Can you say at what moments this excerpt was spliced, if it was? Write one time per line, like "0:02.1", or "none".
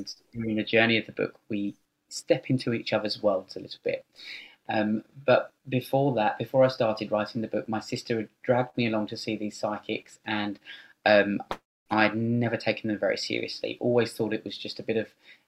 0:05.6